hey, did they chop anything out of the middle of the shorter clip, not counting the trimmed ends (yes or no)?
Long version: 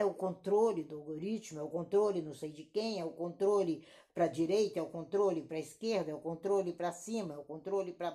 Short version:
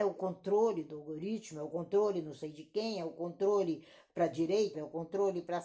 yes